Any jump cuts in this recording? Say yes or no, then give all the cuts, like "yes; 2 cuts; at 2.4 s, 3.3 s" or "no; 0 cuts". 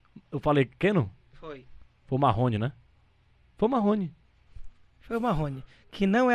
no; 0 cuts